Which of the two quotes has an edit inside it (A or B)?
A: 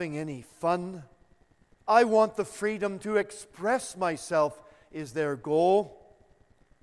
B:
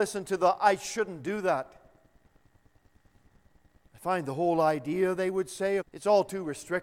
B